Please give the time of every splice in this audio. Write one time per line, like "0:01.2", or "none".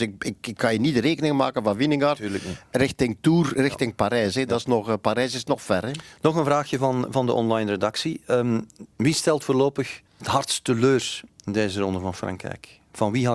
0:08.9
0:10.1